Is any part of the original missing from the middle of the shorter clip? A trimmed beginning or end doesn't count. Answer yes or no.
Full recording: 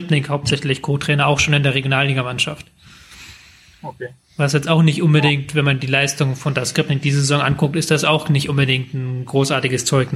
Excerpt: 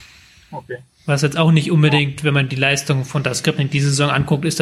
no